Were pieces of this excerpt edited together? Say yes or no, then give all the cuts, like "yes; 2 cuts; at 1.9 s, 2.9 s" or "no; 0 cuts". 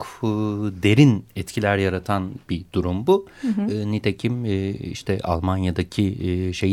no; 0 cuts